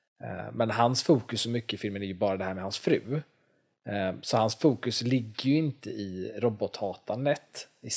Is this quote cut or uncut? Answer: uncut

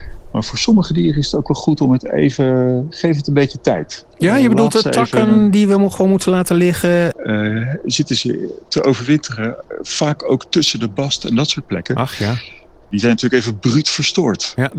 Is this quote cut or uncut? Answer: cut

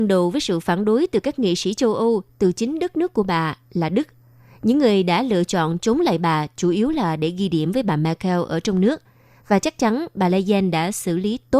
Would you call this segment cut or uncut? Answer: uncut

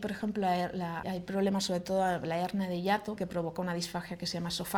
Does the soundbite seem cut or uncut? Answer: cut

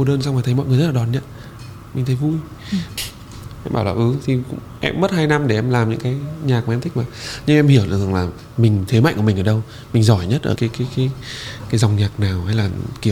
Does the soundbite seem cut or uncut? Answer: cut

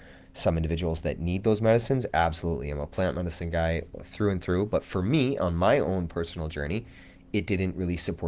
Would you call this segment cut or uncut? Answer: uncut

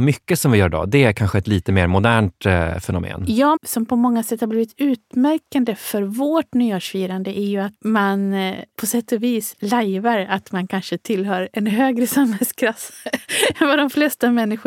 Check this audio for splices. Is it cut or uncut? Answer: cut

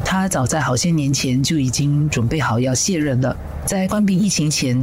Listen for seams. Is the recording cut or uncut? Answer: uncut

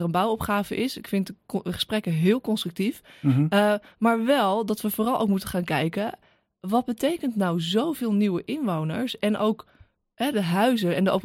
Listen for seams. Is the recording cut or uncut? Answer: uncut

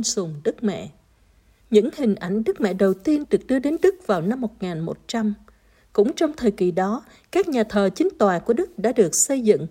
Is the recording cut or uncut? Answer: cut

